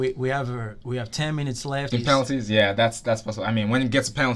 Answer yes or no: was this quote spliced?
yes